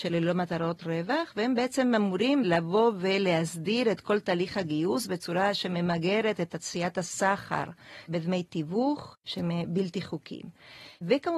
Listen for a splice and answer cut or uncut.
uncut